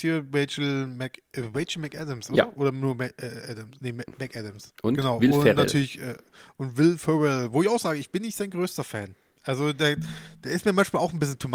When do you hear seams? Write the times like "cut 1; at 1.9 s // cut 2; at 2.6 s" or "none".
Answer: cut 1; at 4.7 s